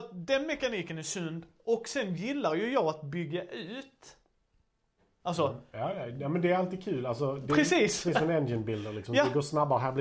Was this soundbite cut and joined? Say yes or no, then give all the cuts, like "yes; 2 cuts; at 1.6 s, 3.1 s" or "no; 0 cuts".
no; 0 cuts